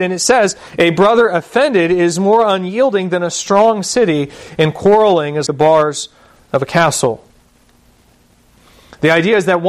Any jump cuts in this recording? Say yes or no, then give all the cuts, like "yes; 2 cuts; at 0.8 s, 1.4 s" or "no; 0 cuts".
yes; 1 cut; at 5.5 s